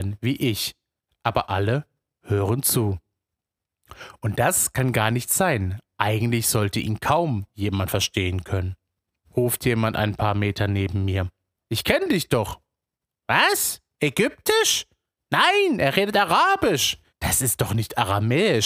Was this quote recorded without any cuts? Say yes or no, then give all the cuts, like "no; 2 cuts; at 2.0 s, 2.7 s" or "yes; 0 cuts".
no; 3 cuts; at 9.2 s, 11.6 s, 17.1 s